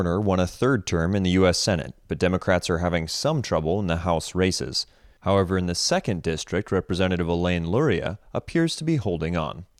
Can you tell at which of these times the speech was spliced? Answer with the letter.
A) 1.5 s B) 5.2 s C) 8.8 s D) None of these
B